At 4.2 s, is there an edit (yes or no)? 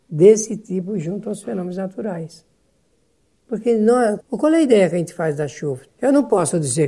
yes